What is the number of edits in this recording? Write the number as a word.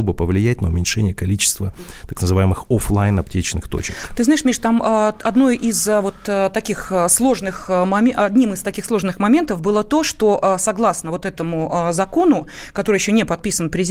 zero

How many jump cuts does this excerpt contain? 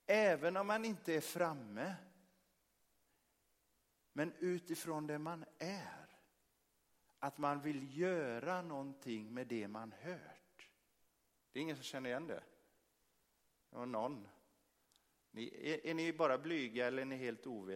one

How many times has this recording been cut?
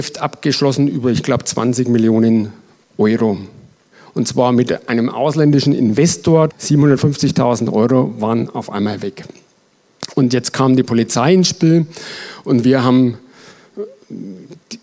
one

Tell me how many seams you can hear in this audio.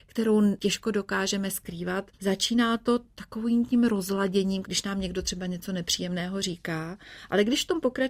two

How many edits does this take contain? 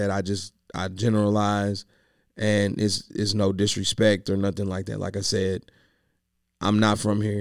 zero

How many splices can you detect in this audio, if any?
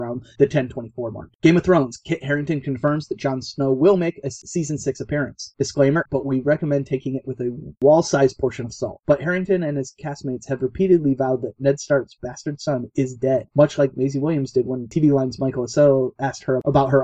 three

